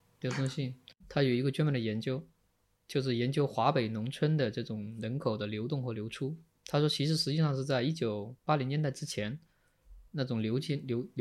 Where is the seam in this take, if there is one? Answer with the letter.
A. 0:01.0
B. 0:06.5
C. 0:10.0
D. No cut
A